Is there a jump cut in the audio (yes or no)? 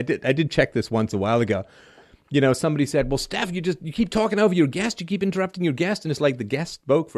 no